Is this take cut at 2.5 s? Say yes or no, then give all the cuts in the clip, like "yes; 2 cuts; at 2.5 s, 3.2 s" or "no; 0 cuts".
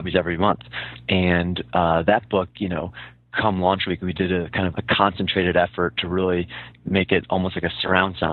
no; 2 cuts; at 1.0 s, 4.7 s